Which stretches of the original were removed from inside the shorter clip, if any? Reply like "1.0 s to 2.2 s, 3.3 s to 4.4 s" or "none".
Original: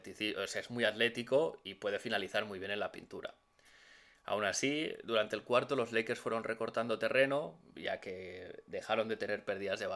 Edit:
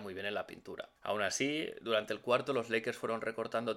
3.4 s to 4.2 s